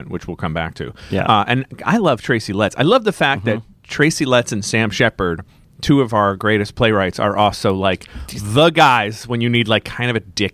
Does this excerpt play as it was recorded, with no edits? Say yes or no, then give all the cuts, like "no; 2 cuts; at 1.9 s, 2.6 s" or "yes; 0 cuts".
yes; 0 cuts